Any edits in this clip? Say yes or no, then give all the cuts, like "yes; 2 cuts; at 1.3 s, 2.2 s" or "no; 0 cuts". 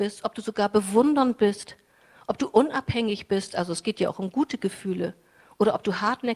no; 0 cuts